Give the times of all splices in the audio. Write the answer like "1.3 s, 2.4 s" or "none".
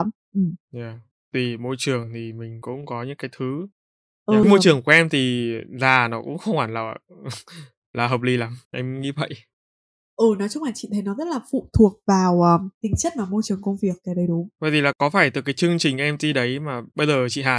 4.4 s, 14.5 s